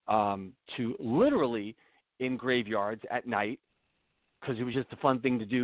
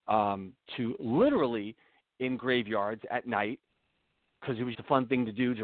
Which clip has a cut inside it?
second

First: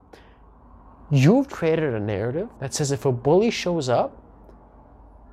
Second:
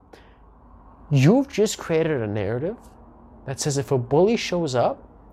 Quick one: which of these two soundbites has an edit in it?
first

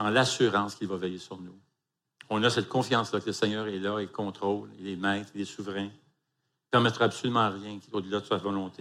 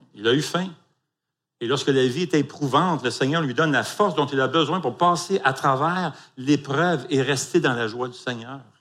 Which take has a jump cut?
first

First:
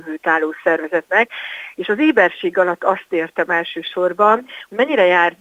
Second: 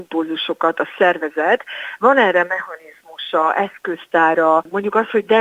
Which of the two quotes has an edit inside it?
first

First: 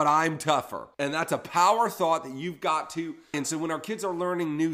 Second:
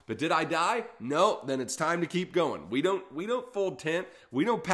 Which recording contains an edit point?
first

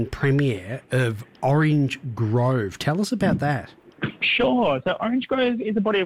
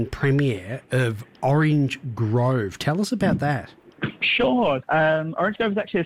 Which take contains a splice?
second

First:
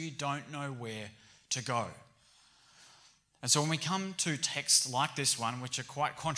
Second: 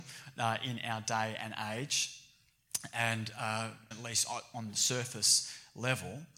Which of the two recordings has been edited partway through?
second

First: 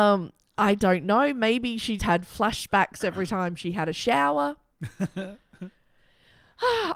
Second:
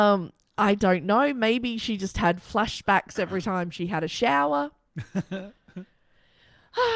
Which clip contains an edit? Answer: first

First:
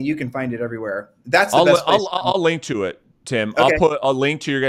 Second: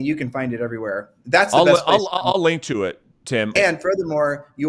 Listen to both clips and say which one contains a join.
second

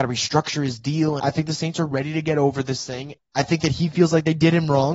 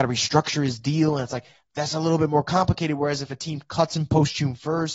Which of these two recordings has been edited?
first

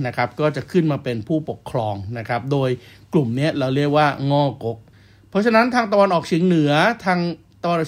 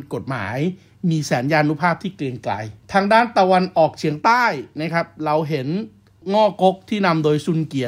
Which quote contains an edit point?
second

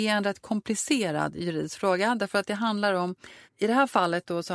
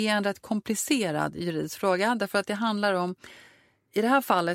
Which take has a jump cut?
first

